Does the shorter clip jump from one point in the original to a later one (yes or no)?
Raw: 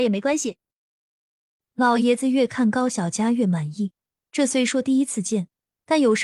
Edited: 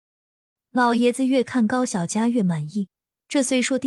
no